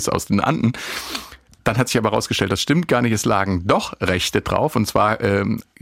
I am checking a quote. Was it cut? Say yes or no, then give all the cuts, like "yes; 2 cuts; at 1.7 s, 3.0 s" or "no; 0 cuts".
no; 0 cuts